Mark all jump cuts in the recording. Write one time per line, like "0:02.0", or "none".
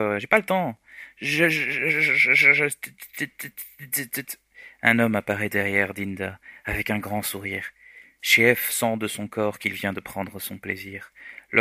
none